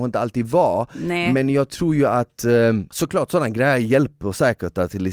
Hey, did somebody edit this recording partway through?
no; 0 cuts

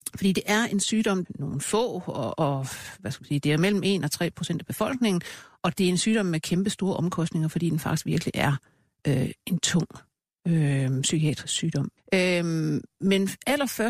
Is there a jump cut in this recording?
yes; 2 cuts; at 1.3 s, 12.0 s

